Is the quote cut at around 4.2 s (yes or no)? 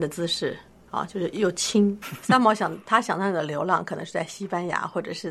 no